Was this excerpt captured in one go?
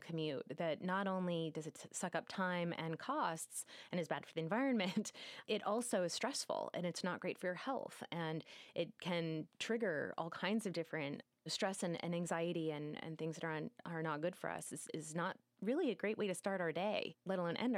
yes; 0 cuts

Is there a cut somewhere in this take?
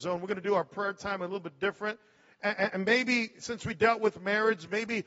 no; 0 cuts

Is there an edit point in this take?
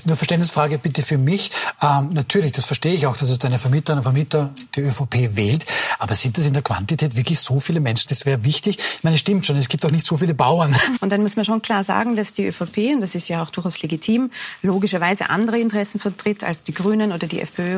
yes; 2 cuts; at 8.1 s, 11.0 s

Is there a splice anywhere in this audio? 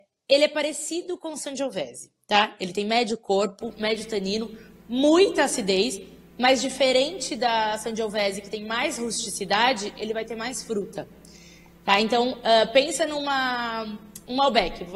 no; 0 cuts

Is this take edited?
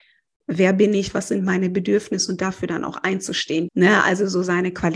yes; 1 cut; at 3.7 s

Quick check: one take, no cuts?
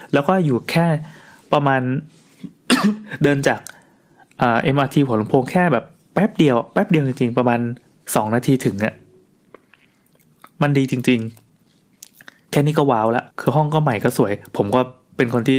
no; 1 cut; at 13.3 s

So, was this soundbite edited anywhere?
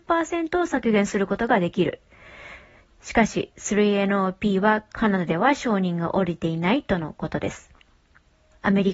no; 0 cuts

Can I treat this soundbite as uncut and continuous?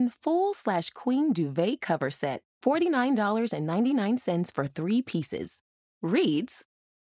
no; 1 cut; at 2.5 s

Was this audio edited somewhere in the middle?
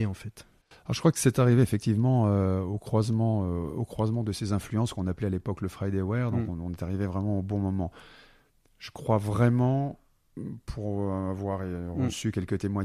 no; 0 cuts

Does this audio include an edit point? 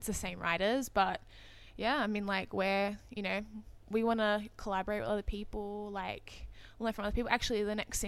no; 0 cuts

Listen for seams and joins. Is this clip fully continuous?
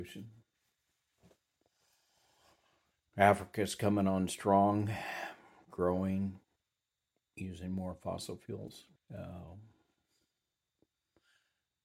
no; 1 cut; at 9.0 s

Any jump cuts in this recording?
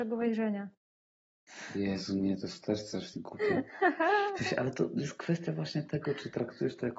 no; 0 cuts

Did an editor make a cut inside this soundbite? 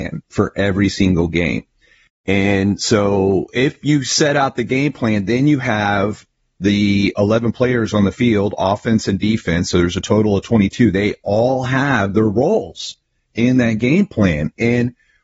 no; 0 cuts

